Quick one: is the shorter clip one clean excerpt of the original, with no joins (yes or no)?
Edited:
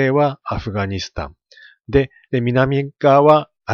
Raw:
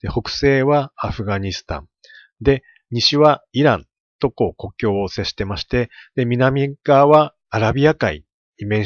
no